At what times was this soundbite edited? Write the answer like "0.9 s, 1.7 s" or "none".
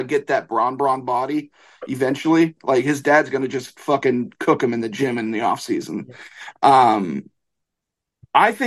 none